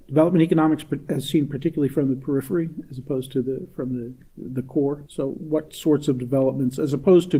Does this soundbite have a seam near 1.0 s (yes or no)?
no